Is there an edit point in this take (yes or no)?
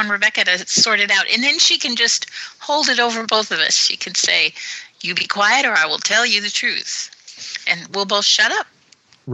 no